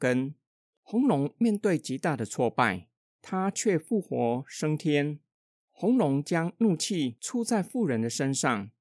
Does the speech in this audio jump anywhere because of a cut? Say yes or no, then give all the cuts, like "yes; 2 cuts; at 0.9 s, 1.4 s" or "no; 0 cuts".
yes; 1 cut; at 3.0 s